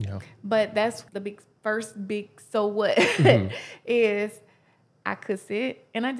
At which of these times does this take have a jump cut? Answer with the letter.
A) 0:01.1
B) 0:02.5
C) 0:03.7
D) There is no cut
A